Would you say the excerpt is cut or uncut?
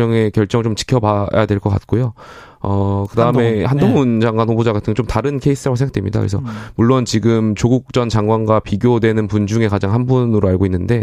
uncut